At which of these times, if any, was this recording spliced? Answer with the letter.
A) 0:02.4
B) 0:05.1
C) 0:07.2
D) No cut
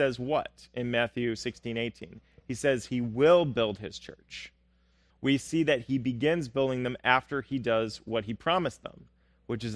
B